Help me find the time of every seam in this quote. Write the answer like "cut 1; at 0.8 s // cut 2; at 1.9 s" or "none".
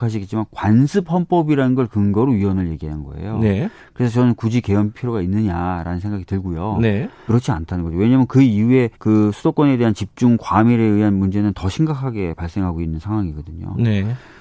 cut 1; at 7.3 s // cut 2; at 8.9 s